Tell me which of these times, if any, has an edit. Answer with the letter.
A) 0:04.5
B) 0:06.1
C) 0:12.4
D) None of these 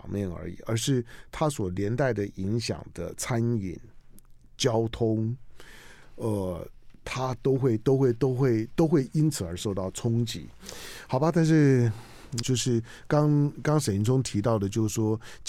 C